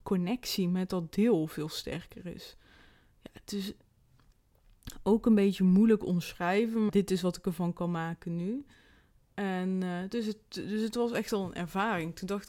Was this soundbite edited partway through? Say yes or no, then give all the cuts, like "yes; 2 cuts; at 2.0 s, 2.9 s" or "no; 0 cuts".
yes; 1 cut; at 6.9 s